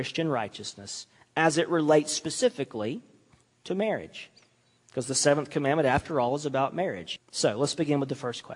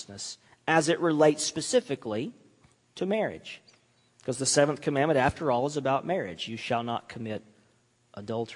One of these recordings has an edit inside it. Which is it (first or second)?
first